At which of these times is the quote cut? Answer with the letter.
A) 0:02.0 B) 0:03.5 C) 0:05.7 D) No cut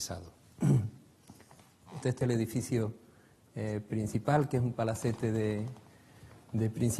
A